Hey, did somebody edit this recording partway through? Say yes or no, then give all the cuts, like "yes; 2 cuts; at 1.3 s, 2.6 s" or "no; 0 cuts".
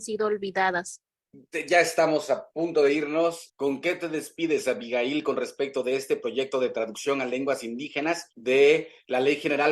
yes; 1 cut; at 3.5 s